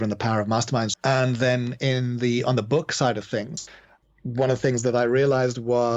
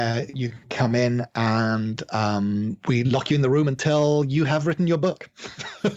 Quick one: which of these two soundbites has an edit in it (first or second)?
first